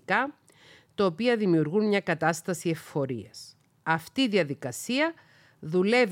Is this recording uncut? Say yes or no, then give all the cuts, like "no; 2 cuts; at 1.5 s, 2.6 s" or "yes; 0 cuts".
yes; 0 cuts